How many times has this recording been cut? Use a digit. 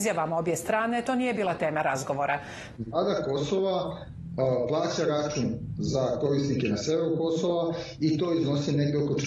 1